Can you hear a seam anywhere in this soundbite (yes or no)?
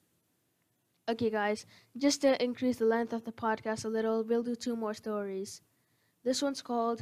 no